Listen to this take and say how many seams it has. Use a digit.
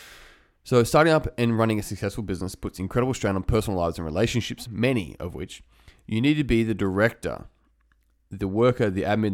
1